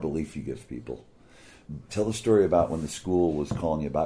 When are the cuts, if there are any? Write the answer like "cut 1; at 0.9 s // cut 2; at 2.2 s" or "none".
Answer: cut 1; at 1.9 s